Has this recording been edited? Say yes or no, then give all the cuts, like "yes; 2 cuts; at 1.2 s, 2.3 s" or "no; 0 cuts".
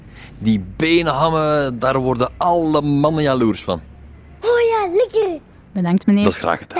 yes; 1 cut; at 4.4 s